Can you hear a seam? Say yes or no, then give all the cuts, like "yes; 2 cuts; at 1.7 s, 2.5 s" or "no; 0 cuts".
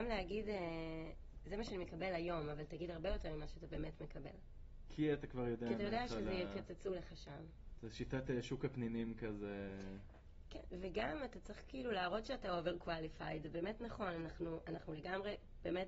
no; 0 cuts